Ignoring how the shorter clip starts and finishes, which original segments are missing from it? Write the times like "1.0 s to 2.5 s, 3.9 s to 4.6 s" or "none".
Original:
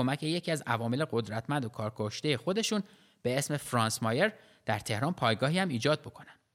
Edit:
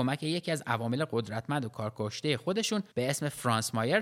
2.9 s to 3.2 s